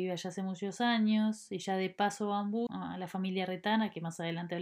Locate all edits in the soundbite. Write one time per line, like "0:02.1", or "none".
0:02.7